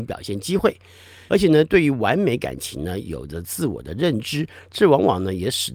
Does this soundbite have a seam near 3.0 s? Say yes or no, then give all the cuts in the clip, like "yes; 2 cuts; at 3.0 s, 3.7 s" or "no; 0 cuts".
no; 1 cut; at 1.3 s